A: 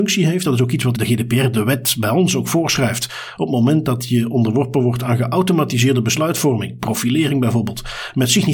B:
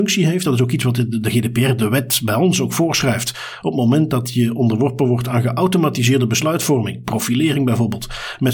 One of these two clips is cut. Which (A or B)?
A